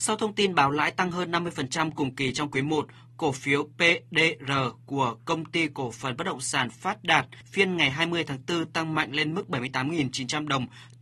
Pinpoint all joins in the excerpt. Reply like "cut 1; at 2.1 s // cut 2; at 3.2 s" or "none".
none